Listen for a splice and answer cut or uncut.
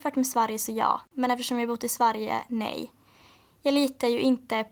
uncut